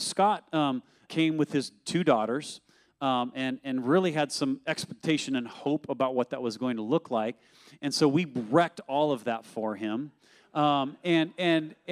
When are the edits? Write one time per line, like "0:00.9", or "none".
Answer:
0:01.1